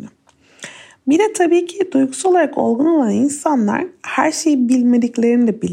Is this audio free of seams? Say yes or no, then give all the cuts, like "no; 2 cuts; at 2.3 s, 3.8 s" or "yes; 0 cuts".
yes; 0 cuts